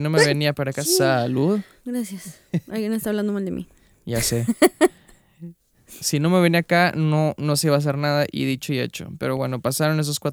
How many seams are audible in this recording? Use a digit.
0